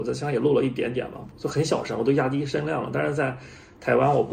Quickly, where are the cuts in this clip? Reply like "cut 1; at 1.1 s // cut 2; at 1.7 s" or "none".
cut 1; at 1.3 s